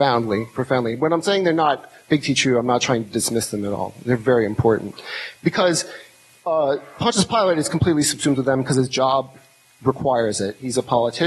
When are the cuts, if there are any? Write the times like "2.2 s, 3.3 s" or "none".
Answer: none